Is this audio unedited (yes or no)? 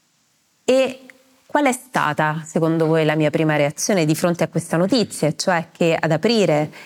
yes